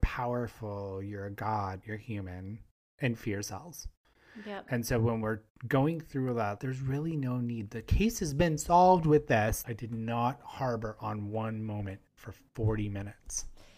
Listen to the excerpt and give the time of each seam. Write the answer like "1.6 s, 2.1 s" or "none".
1.8 s, 6.6 s, 9.6 s